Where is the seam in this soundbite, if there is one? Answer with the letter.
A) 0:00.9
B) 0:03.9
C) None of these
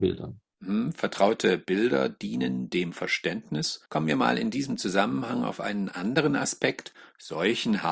B